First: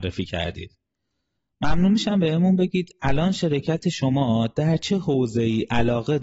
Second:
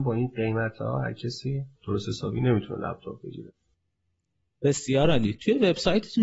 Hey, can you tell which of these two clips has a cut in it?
second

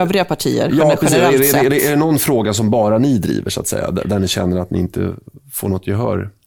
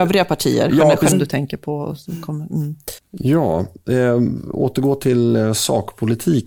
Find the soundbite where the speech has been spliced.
second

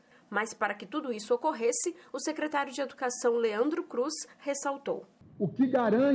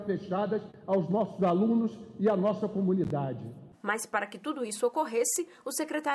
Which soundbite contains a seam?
second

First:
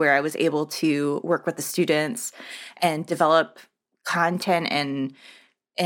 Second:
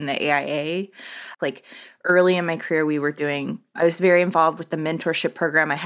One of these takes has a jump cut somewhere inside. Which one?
second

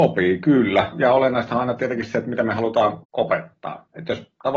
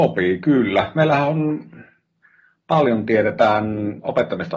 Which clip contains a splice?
first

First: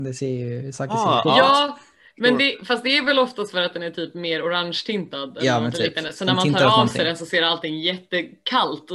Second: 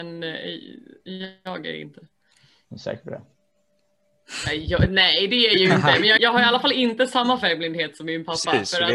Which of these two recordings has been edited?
second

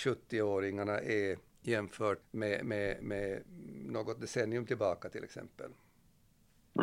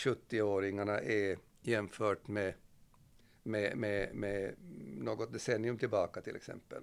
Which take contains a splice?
first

